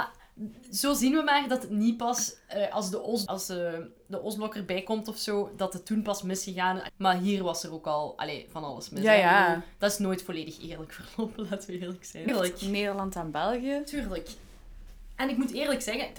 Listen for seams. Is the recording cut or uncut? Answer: cut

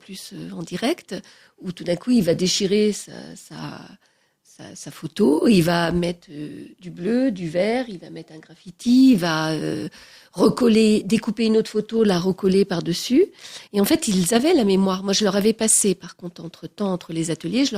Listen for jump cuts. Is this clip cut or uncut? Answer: uncut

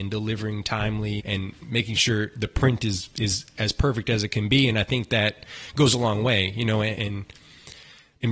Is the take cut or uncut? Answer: cut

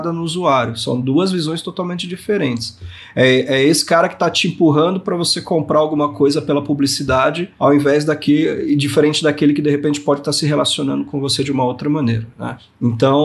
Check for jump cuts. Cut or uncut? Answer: uncut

